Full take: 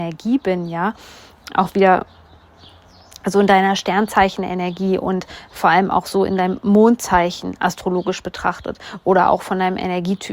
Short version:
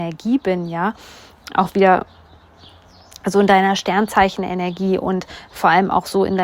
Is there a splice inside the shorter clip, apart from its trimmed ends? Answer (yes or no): no